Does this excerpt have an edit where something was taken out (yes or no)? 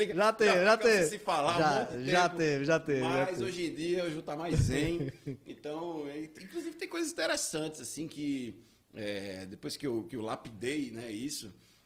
no